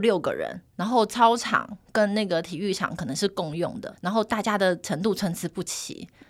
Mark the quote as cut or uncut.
cut